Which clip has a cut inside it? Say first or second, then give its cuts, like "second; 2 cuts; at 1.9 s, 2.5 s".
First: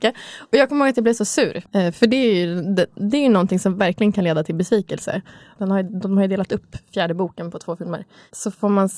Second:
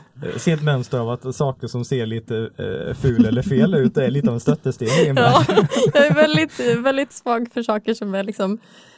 first; 2 cuts; at 1.7 s, 5.6 s